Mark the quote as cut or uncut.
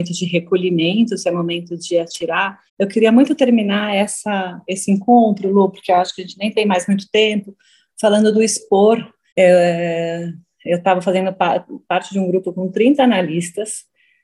cut